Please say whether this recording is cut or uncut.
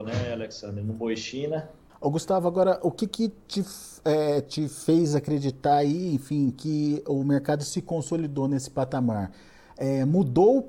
cut